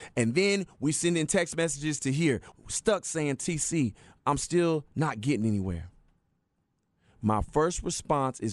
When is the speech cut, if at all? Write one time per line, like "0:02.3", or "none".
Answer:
0:02.5